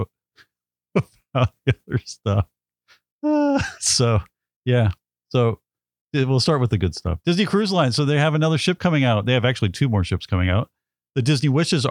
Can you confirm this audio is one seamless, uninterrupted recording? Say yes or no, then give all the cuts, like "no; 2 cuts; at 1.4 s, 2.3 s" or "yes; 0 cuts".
yes; 0 cuts